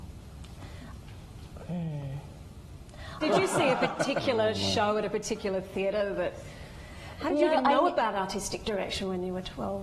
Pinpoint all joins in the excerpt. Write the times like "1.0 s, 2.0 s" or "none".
3.2 s